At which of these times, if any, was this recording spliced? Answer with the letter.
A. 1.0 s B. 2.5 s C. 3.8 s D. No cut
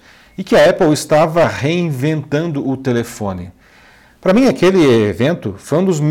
D